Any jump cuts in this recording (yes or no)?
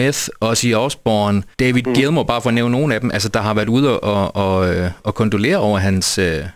yes